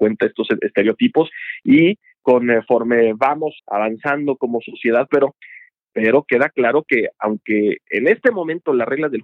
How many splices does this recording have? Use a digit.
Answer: 2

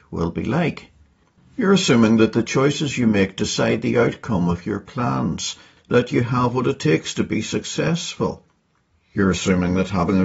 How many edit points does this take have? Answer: 2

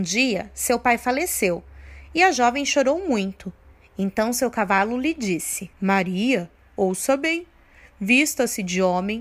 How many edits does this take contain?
1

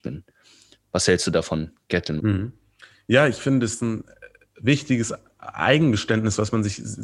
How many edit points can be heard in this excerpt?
1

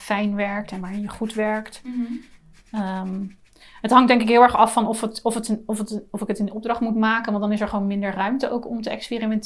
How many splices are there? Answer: 0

